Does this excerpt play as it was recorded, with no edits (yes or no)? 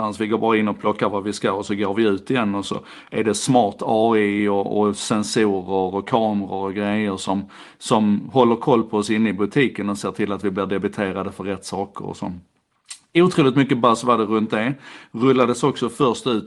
yes